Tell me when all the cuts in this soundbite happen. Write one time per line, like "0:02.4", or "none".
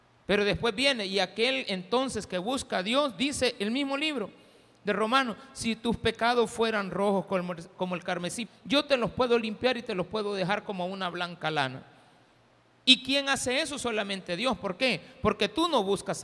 0:08.5